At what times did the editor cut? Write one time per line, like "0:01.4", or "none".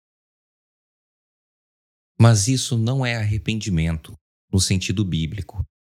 none